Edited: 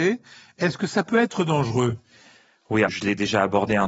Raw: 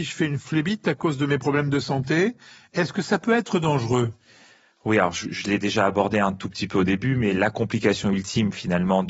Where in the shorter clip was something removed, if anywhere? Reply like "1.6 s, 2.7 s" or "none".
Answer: 2.9 s

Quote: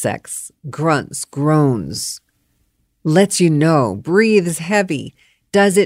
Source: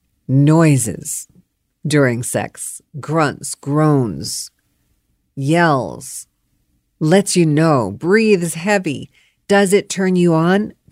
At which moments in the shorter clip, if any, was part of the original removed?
2.9 s

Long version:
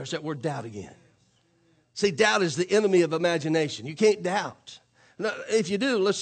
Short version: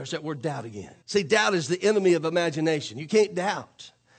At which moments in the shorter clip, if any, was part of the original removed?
1.0 s

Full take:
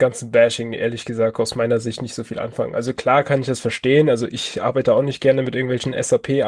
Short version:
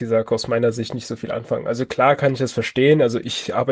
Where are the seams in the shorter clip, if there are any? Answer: none

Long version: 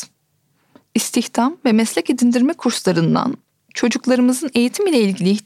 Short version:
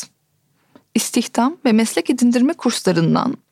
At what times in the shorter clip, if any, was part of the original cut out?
none

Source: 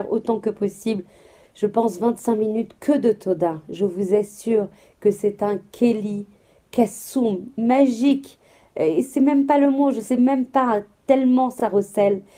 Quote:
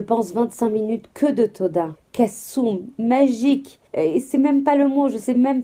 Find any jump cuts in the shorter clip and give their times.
2.0 s, 3.9 s

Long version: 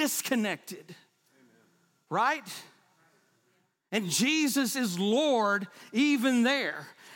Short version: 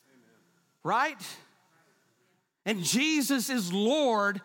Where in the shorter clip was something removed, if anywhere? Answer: none

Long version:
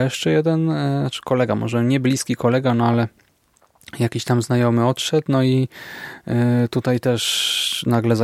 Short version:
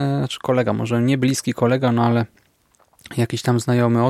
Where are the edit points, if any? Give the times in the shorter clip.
none

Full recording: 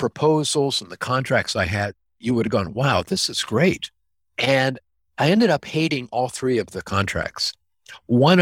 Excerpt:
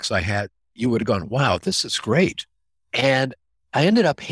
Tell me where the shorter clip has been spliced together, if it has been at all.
none

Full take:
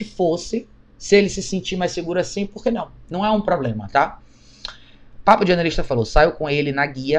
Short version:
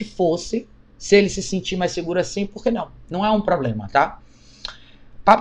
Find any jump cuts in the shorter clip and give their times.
none

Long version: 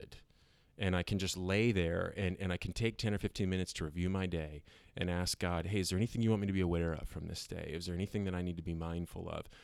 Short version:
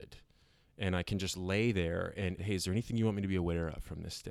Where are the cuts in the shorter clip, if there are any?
2.4 s

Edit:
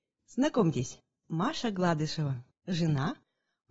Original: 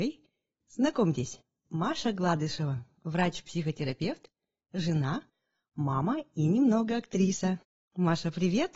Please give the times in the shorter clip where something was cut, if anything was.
2.5 s

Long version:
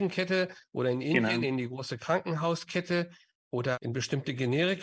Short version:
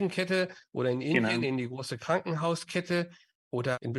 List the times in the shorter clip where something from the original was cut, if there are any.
none

